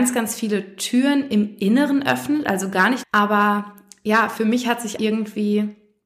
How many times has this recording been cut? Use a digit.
2